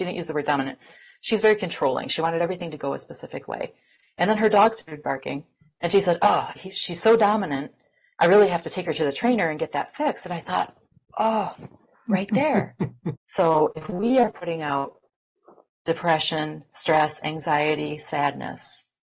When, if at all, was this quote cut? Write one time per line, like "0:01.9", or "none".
0:06.6
0:13.2